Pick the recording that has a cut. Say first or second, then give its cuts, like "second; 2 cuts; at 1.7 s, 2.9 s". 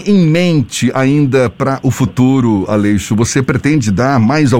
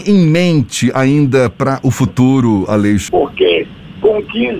second; 1 cut; at 3.1 s